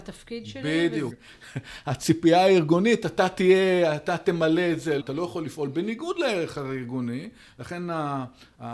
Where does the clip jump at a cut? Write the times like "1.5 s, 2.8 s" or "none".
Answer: 1.1 s, 5.0 s